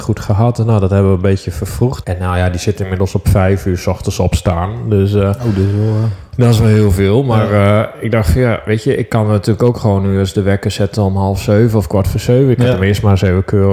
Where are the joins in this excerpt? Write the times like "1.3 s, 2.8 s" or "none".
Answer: 2.0 s